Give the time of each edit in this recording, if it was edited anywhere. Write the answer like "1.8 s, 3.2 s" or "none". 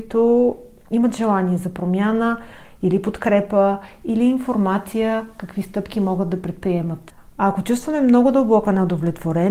2.6 s, 7.2 s